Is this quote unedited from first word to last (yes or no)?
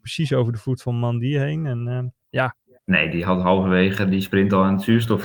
no